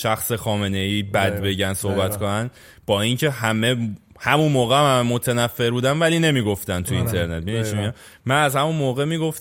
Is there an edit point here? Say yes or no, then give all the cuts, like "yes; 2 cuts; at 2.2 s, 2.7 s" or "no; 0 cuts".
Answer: no; 0 cuts